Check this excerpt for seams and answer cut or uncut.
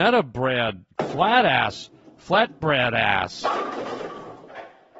uncut